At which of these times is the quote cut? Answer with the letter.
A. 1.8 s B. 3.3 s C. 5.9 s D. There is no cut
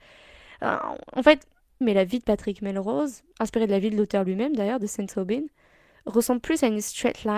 A